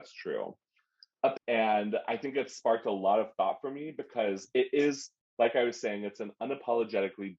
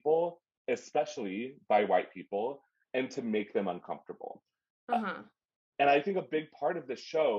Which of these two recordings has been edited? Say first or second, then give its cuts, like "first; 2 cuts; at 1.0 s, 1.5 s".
first; 1 cut; at 1.4 s